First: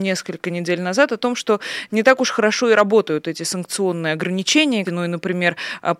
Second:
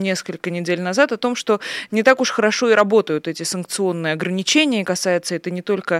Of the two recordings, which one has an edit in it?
first; 1 cut; at 4.9 s

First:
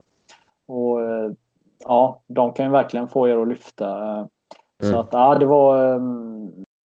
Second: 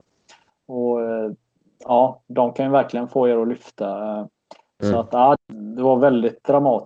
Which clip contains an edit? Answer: second; 1 cut; at 5.4 s

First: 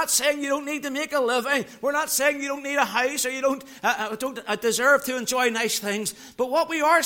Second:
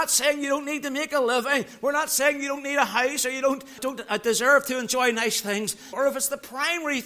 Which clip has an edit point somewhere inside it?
second; 2 cuts; at 3.8 s, 5.9 s

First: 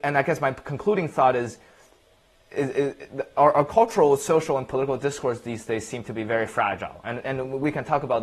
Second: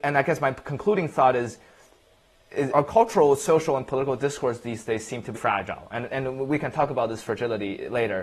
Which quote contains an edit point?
second; 2 cuts; at 2.7 s, 5.4 s

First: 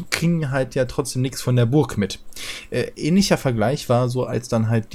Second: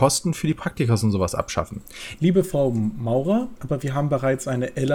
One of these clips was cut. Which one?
second; 2 cuts; at 2.2 s, 3.6 s

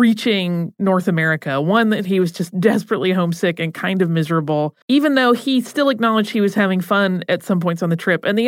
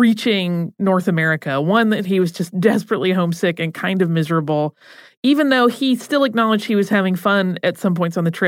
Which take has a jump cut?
first; 1 cut; at 4.8 s

